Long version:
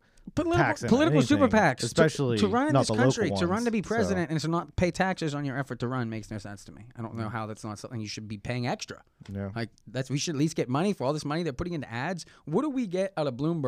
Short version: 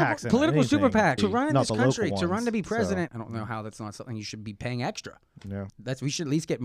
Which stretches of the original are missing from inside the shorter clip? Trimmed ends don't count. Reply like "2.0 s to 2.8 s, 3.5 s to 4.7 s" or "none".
1.8 s to 2.4 s, 4.3 s to 6.9 s, 9.5 s to 9.8 s